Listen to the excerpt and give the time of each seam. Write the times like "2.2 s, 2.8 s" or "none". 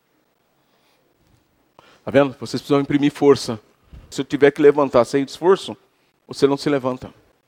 4.1 s